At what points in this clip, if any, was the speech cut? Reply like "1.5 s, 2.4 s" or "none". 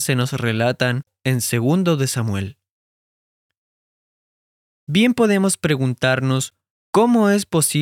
none